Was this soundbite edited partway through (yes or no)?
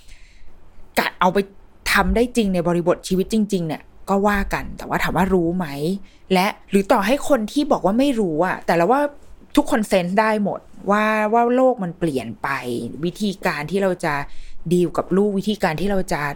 yes